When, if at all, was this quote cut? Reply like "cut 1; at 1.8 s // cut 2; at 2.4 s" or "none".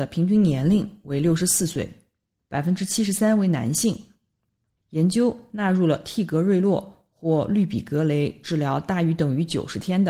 cut 1; at 4.7 s